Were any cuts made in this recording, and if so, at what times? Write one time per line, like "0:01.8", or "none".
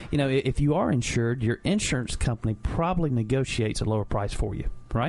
none